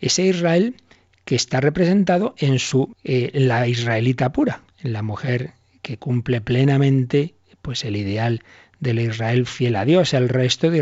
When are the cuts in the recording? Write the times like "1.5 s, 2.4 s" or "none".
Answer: 2.9 s, 4.7 s